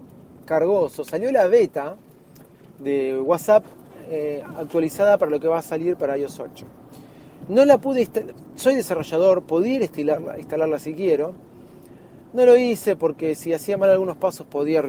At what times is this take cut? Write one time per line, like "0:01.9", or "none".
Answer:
none